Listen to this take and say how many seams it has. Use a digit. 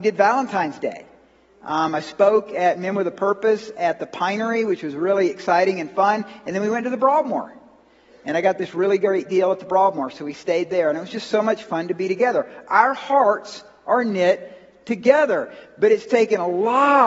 0